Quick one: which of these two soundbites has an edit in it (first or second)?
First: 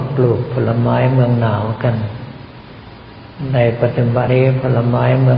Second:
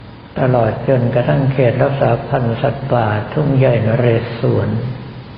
first